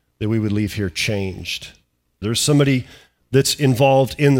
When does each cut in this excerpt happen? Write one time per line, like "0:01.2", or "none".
0:02.2